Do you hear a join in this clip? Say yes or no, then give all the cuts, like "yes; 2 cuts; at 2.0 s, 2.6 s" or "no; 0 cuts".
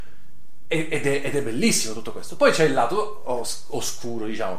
no; 0 cuts